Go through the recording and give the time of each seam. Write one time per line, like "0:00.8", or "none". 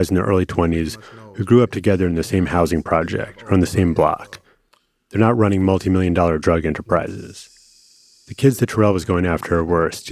none